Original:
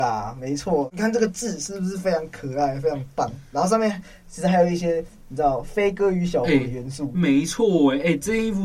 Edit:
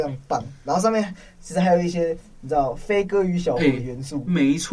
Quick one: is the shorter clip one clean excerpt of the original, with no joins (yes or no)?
yes